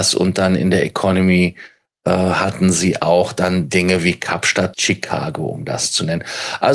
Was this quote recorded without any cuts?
no; 1 cut; at 4.7 s

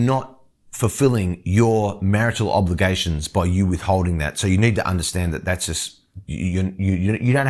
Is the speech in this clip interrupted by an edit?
no; 0 cuts

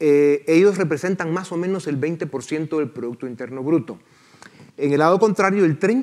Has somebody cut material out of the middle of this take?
yes; 1 cut; at 4.7 s

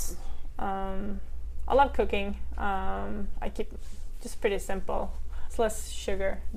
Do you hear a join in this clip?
no; 0 cuts

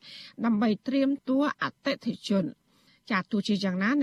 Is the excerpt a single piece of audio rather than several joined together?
no; 1 cut; at 1.2 s

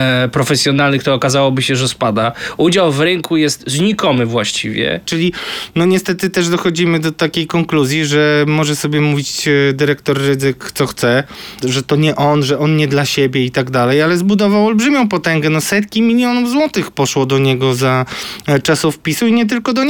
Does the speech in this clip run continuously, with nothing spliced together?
no; 2 cuts; at 5.0 s, 11.6 s

